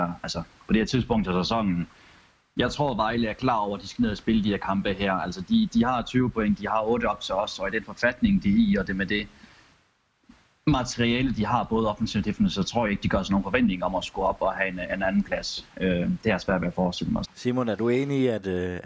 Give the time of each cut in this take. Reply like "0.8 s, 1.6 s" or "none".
17.2 s